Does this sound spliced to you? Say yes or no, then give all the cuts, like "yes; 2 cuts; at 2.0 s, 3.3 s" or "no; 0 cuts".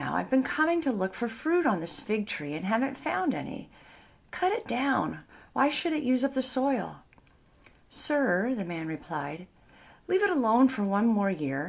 no; 0 cuts